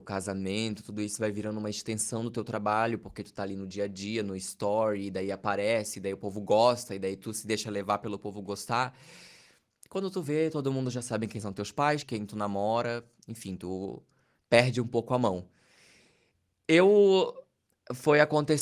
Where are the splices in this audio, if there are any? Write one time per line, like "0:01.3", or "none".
0:12.0